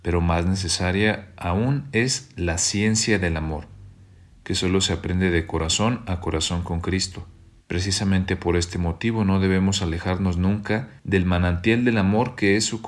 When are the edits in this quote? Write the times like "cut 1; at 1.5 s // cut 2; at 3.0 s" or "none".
cut 1; at 7.6 s // cut 2; at 11.0 s